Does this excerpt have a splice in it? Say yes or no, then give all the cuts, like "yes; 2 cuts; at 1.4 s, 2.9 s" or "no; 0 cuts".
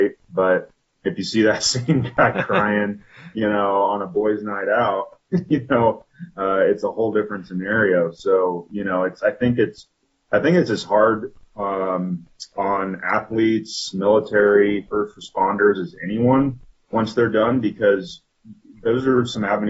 no; 0 cuts